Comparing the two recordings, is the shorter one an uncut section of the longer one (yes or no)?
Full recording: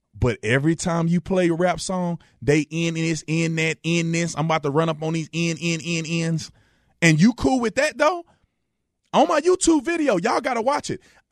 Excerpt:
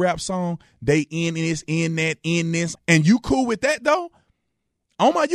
no